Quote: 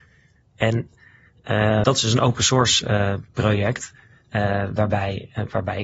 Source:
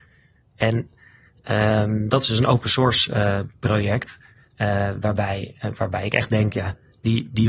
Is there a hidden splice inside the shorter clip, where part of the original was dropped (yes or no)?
yes